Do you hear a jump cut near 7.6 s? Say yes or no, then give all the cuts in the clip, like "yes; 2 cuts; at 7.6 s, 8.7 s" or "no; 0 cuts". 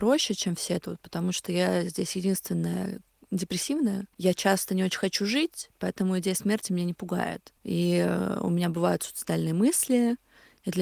yes; 2 cuts; at 4.1 s, 7.6 s